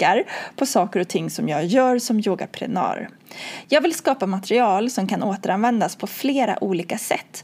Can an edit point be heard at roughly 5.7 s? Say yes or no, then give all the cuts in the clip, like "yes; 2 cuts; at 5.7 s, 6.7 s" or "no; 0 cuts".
no; 1 cut; at 3.6 s